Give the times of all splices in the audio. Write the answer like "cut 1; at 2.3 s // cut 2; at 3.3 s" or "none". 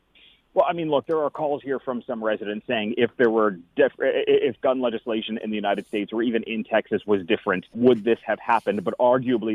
cut 1; at 7.7 s